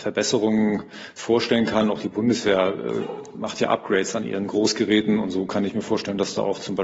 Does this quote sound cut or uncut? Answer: uncut